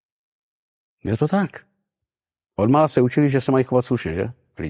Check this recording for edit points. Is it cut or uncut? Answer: uncut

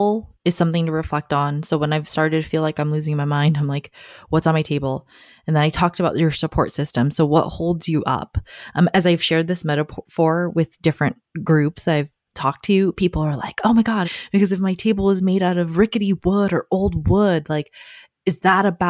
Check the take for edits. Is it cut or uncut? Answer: cut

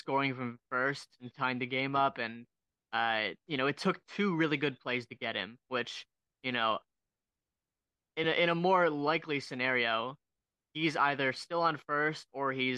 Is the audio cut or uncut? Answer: uncut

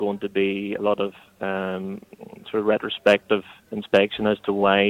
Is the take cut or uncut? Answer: uncut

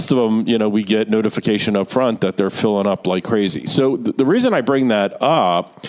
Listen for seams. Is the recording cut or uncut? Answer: uncut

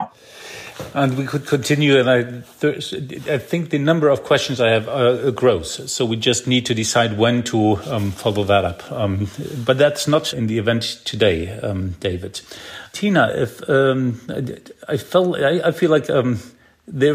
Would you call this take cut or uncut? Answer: uncut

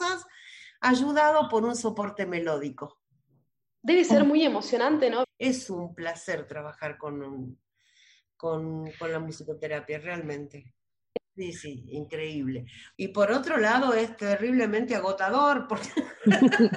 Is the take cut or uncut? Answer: cut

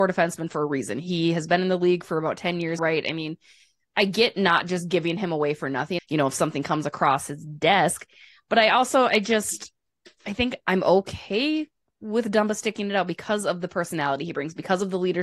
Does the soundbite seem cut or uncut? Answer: cut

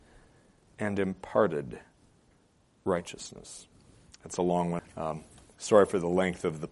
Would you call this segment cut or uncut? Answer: cut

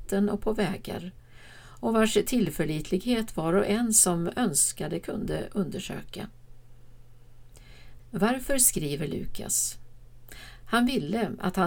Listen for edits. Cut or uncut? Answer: cut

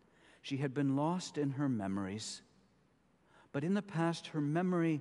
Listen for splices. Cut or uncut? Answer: uncut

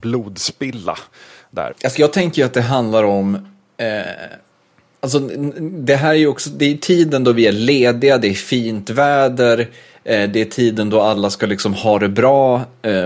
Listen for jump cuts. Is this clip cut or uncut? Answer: cut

